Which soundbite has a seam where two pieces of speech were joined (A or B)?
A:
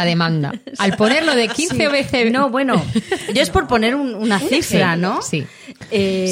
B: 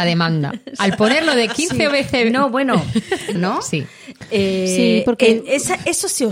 B